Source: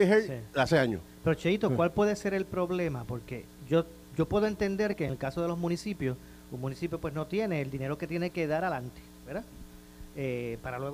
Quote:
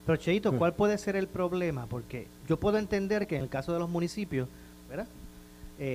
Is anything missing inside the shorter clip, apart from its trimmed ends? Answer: yes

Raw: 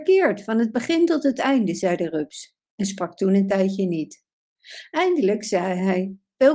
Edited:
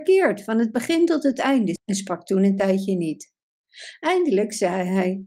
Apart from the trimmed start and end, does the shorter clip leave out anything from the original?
yes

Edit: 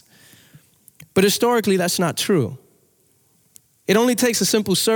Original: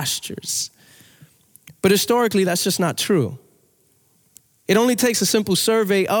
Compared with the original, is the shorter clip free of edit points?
no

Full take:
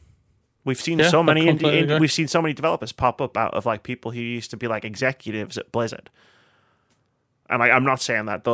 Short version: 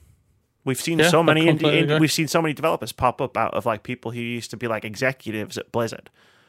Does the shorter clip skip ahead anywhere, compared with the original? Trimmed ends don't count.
no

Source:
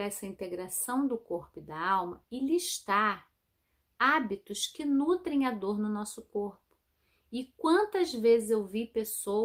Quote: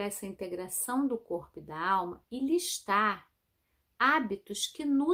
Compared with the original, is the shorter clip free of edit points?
yes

